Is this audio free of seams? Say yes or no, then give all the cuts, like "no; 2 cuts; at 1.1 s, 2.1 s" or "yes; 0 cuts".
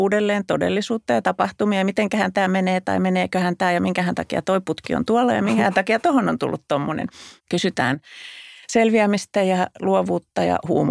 no; 1 cut; at 7.4 s